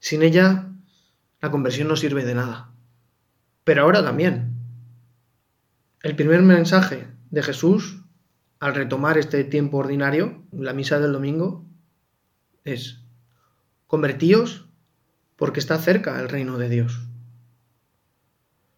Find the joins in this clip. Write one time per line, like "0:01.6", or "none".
0:03.6
0:10.5